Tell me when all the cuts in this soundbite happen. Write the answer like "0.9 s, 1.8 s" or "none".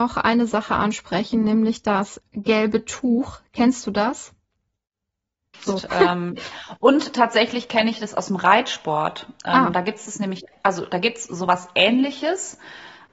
5.7 s